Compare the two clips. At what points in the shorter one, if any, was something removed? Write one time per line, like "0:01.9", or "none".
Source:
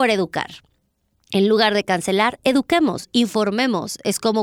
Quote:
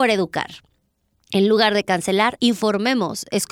0:02.4

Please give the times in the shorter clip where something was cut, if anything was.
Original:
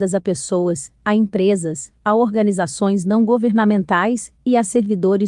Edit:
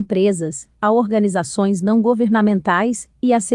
none

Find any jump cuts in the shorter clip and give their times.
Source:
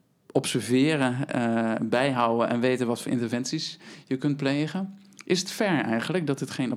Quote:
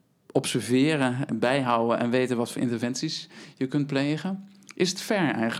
0:01.3

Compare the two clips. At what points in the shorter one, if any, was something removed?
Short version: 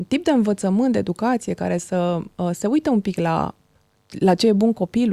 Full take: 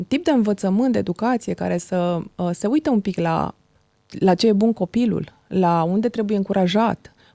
none

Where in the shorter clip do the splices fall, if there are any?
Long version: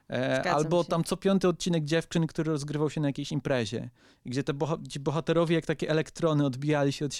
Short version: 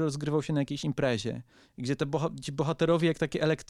none

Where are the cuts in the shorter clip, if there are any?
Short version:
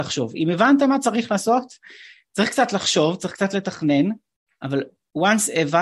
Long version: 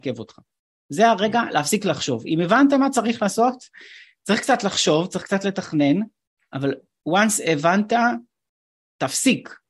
none

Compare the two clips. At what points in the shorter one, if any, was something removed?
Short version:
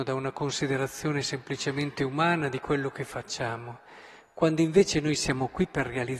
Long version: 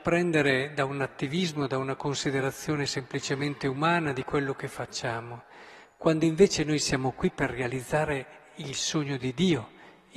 none

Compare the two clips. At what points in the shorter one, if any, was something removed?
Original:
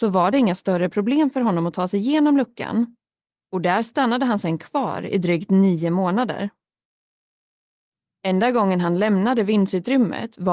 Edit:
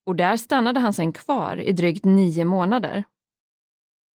none

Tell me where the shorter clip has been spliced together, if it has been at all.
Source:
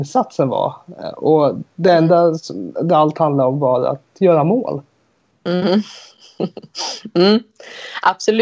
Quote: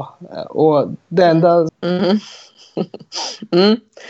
0:01.7

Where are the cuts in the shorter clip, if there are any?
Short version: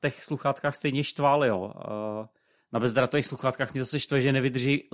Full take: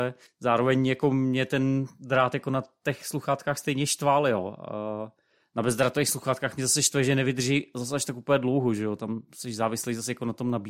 none

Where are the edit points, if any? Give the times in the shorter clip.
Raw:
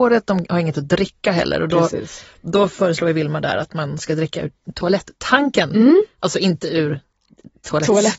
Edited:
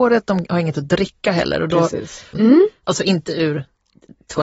0:02.3

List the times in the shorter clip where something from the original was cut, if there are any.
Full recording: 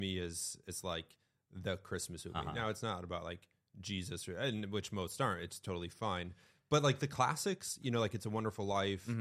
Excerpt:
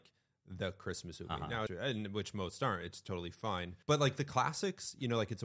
0:01.7
0:03.8

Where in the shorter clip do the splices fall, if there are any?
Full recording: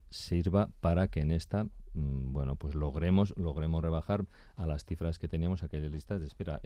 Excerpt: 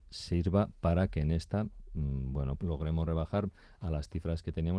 0:02.6

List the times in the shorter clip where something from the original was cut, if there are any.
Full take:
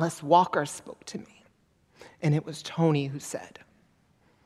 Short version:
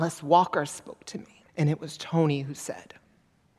0:01.5

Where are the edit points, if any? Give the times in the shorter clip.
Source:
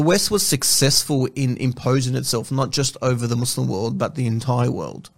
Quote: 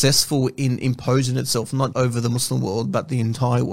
0:01.9

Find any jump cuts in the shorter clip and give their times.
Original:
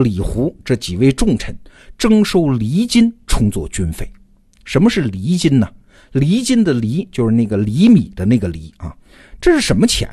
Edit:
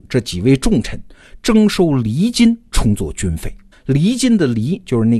0:03.7

